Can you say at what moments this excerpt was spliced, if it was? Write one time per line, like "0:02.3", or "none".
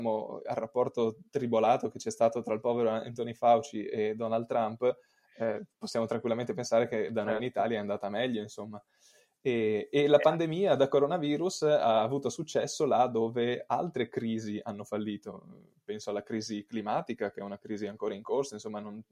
none